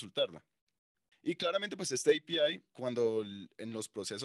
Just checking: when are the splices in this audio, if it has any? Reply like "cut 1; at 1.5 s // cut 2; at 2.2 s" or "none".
cut 1; at 1.1 s // cut 2; at 2.7 s